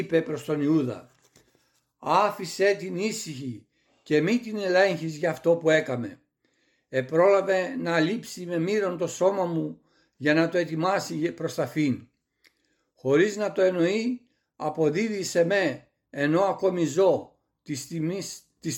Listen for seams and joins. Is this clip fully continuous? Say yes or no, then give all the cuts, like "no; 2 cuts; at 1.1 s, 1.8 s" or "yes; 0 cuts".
yes; 0 cuts